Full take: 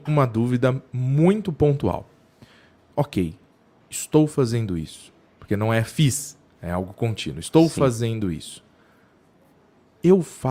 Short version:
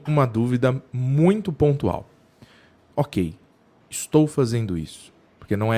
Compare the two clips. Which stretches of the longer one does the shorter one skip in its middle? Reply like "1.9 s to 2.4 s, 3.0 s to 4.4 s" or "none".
none